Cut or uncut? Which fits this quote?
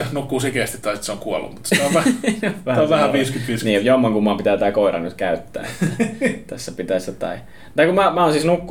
uncut